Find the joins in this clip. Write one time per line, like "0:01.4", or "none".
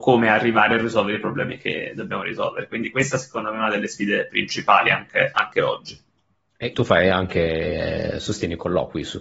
0:06.7